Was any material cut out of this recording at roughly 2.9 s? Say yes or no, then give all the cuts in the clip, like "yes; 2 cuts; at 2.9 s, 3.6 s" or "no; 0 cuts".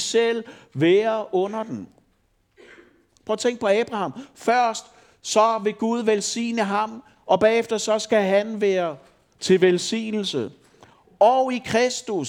no; 0 cuts